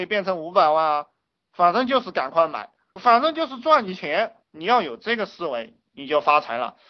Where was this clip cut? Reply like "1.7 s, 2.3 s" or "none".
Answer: 4.4 s